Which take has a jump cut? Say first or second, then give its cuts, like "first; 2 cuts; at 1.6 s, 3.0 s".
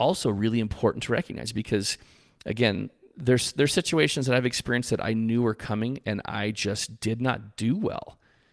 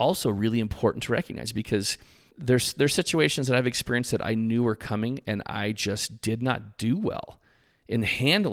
second; 1 cut; at 2.3 s